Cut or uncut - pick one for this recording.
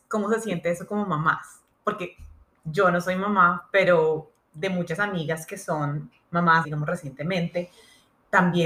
cut